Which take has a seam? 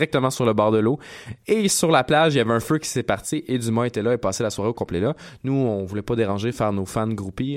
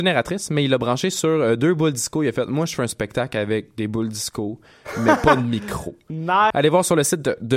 second; 1 cut; at 6.5 s

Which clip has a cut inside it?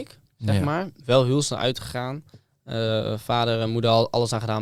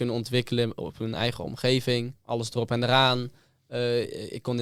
second; 1 cut; at 2.1 s

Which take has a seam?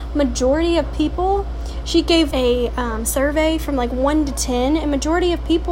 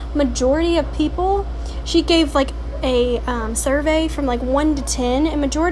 first; 1 cut; at 2.3 s

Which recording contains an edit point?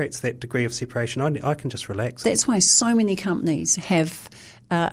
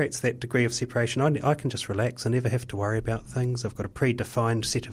first; 1 cut; at 2.2 s

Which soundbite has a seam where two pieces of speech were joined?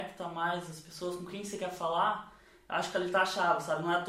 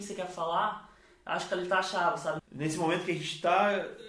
second; 1 cut; at 2.4 s

